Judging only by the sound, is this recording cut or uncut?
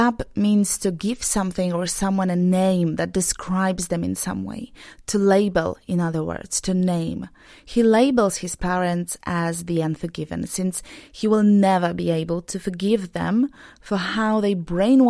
uncut